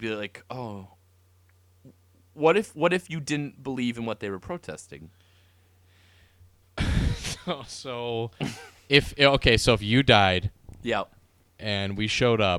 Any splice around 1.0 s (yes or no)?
no